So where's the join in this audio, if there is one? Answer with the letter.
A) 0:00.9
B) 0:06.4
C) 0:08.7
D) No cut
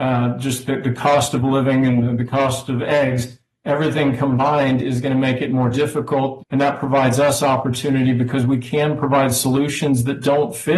B